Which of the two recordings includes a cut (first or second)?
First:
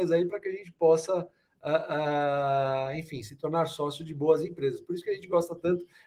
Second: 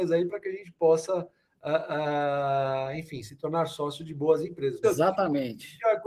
second